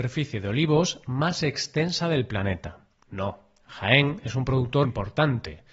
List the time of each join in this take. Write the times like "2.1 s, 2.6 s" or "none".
3.0 s, 4.8 s